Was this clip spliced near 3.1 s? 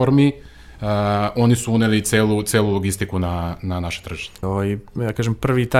no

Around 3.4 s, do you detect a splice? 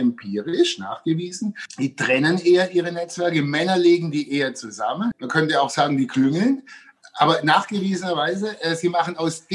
no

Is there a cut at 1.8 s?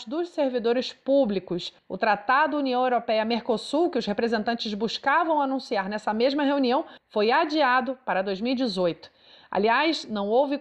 yes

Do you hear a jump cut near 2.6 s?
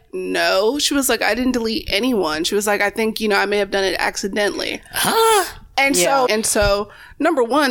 no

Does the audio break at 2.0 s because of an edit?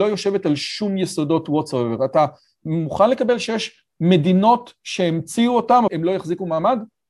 no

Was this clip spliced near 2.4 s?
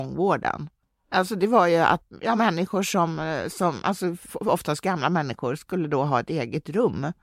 no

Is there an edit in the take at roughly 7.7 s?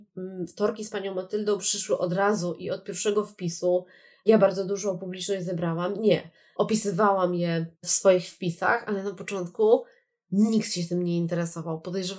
yes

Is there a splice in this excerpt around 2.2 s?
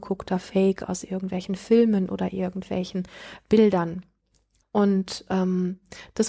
no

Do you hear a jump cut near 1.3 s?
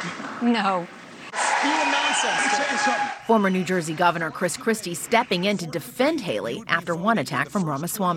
yes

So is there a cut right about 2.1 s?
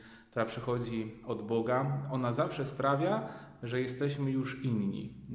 no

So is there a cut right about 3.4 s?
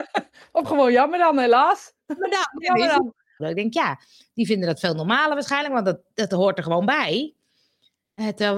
yes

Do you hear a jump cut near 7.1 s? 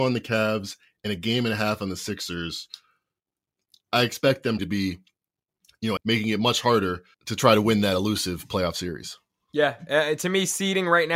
yes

